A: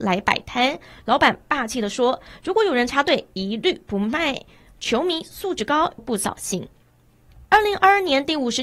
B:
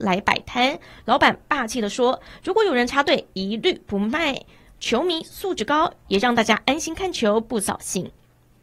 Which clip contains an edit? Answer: A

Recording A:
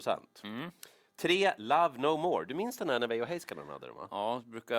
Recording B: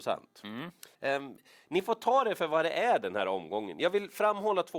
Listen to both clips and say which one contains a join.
B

